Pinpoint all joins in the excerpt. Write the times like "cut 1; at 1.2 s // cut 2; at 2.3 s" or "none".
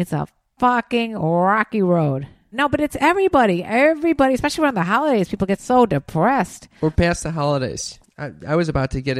cut 1; at 2.5 s // cut 2; at 8.0 s